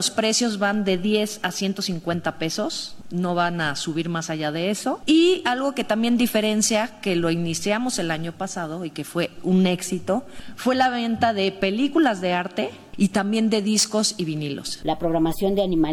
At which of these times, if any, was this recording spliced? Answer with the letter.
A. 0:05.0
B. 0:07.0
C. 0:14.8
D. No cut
C